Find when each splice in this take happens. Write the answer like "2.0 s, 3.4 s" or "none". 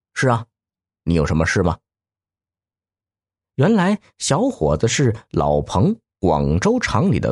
none